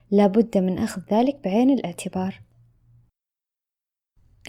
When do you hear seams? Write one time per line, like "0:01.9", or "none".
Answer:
none